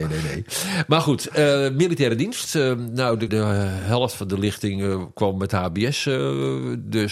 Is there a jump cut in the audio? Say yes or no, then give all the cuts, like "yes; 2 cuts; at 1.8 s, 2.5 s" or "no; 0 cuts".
yes; 1 cut; at 3.3 s